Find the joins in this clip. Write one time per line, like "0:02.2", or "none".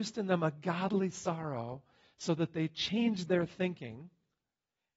none